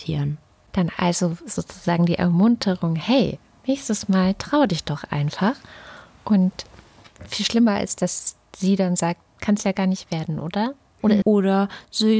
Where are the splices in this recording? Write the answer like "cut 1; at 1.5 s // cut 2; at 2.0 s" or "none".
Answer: cut 1; at 9.3 s // cut 2; at 11.2 s